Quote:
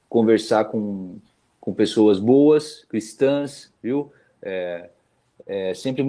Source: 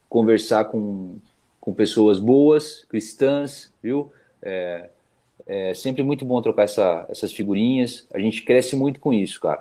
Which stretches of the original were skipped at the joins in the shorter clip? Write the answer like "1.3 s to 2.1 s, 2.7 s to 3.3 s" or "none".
none